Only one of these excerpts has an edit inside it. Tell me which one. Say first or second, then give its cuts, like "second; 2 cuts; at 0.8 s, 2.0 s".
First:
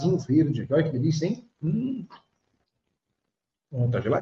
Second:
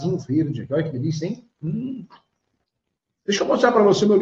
second; 1 cut; at 3.1 s